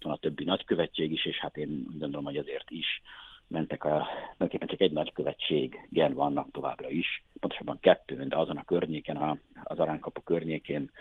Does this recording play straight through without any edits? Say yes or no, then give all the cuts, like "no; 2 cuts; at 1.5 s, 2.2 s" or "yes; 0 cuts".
no; 1 cut; at 9.2 s